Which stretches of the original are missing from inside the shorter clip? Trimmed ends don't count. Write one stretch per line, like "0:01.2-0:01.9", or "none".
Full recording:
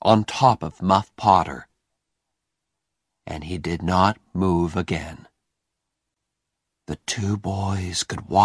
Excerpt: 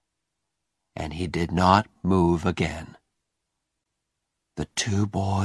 none